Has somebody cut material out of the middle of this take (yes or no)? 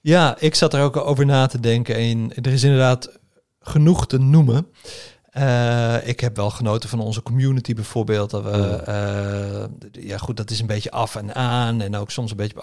no